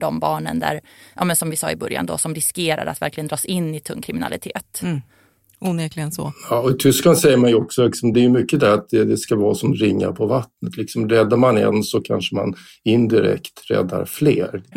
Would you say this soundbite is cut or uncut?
cut